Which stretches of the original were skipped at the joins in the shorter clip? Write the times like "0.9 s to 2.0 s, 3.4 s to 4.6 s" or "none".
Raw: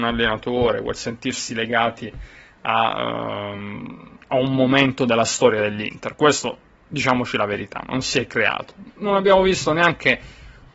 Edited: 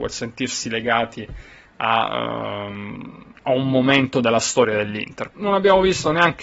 6.2 s to 8.9 s